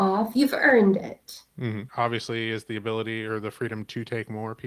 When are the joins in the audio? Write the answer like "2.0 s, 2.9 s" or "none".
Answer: 1.9 s